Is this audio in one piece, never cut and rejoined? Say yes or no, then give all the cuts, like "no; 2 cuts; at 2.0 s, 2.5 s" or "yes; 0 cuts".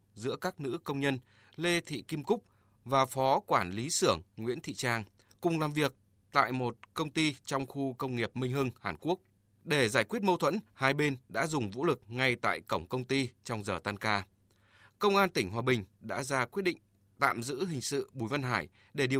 yes; 0 cuts